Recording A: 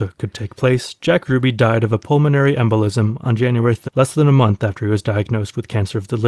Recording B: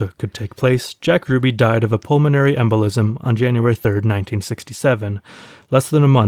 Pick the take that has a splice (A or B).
A